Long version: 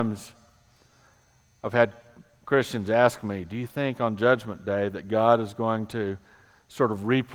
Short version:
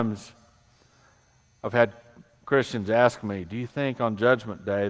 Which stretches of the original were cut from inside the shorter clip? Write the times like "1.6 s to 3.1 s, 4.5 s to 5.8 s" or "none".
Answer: none